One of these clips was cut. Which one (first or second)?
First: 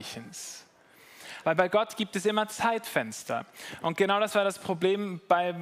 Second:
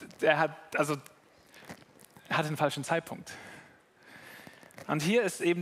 first